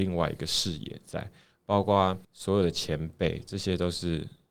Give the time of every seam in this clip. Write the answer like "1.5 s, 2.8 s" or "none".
2.2 s